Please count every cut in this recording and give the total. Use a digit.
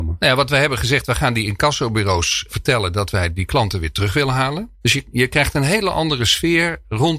2